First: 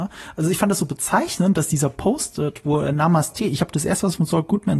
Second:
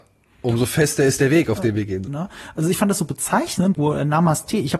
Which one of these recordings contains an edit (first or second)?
second